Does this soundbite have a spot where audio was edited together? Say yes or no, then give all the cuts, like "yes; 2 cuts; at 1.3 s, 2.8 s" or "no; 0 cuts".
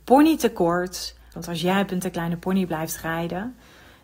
yes; 1 cut; at 1.3 s